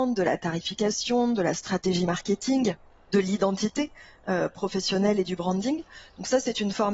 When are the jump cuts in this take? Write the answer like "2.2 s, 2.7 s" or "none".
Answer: none